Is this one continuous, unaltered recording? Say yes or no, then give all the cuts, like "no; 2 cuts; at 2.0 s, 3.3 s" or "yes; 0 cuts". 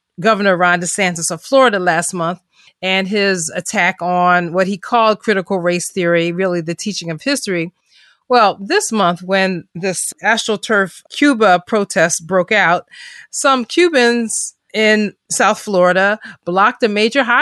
yes; 0 cuts